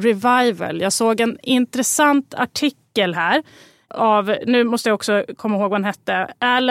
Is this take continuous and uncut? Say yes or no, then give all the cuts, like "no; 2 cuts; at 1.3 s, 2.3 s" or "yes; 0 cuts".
no; 1 cut; at 3.9 s